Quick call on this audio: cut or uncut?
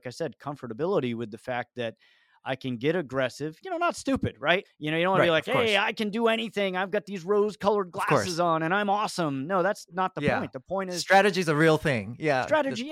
cut